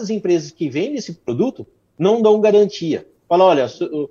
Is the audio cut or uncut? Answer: uncut